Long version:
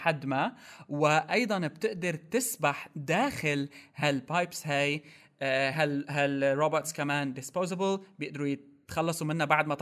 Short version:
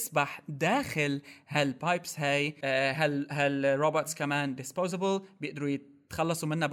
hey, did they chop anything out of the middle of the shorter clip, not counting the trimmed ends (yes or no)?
yes